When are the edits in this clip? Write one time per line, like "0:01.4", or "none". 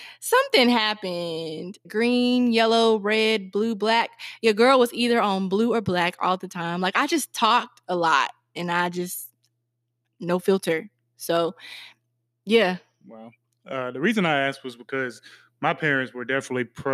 0:01.8